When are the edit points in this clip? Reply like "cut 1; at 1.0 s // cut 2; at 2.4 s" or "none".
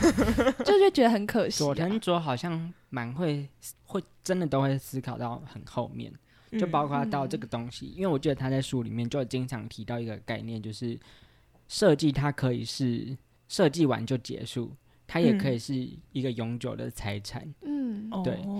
cut 1; at 3.7 s